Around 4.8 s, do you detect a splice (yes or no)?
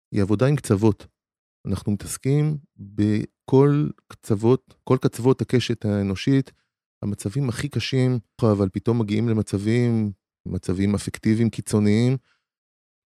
no